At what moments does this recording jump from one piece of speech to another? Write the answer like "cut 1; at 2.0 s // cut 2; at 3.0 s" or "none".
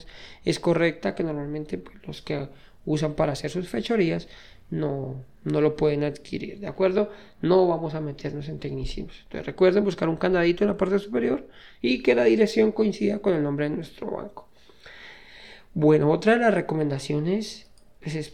none